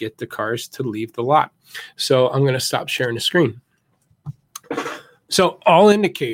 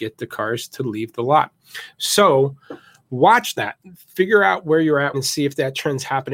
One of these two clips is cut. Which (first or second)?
second